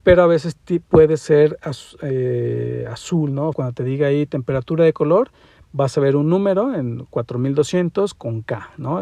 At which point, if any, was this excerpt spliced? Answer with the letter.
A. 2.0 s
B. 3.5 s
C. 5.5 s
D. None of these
B